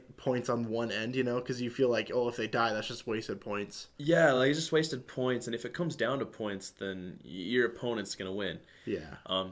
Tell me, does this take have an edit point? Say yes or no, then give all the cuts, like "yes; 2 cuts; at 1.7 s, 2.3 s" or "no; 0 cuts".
no; 0 cuts